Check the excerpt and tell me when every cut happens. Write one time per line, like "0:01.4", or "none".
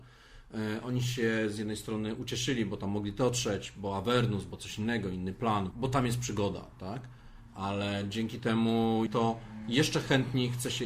0:05.7
0:09.1